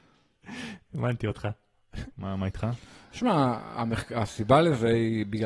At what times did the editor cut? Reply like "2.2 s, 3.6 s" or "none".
2.1 s